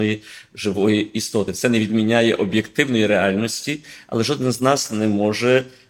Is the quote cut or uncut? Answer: uncut